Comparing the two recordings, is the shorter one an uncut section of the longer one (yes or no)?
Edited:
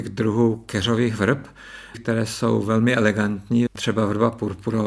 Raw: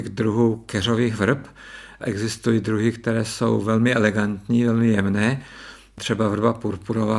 no